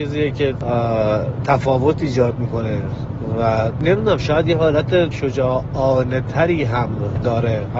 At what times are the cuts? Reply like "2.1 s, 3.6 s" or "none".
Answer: 5.1 s